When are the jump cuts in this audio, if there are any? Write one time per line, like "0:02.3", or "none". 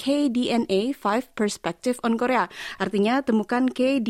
none